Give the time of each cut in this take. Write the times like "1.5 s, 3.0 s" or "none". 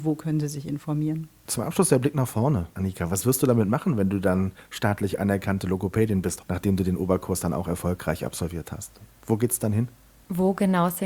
6.4 s

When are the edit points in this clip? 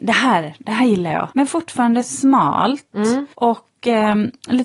1.3 s, 3.3 s

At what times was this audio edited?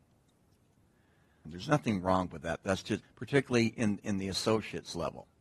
1.4 s, 3.0 s

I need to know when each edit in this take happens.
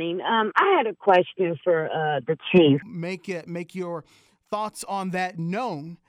2.8 s

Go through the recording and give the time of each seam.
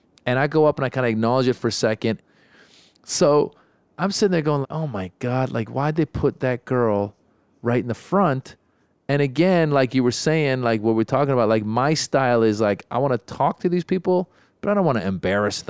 2.2 s, 4.6 s

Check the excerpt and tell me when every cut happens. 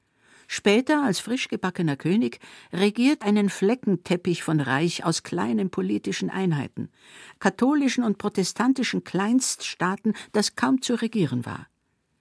3.2 s, 7.4 s

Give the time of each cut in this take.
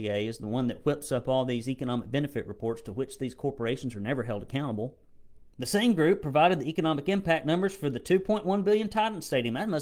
5.5 s

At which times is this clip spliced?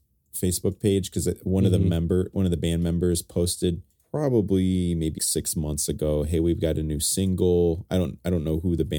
5.2 s

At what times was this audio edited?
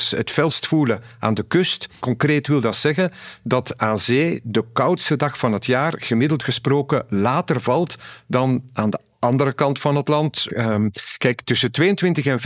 2.0 s, 10.5 s

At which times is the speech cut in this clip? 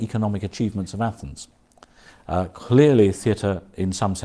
2.1 s

